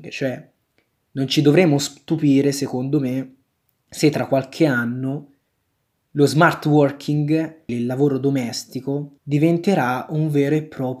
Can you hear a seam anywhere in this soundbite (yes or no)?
yes